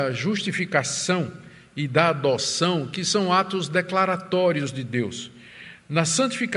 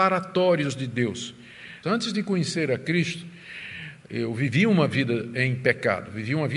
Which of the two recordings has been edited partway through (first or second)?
second